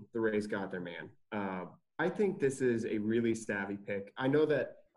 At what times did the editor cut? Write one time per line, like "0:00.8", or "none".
0:02.0